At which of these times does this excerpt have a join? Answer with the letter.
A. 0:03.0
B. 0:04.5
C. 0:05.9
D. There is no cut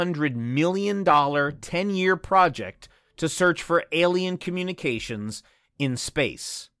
D